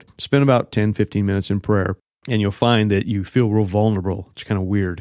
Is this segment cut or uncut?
uncut